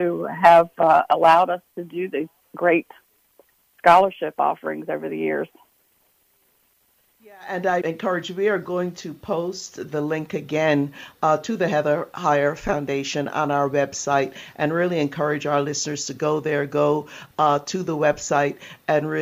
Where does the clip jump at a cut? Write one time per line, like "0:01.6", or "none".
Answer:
0:07.8